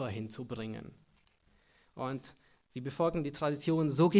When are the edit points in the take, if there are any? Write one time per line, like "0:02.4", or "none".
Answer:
0:01.9